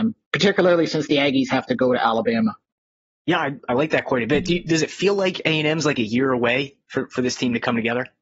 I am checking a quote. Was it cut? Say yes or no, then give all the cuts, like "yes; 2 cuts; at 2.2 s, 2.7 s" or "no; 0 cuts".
yes; 1 cut; at 3.6 s